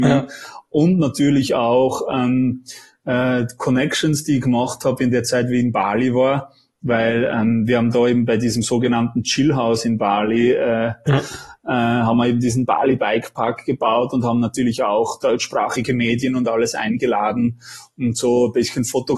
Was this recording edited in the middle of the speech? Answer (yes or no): yes